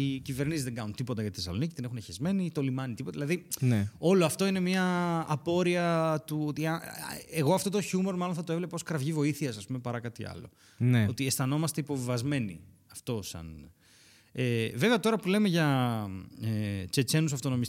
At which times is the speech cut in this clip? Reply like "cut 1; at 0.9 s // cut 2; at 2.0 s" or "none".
none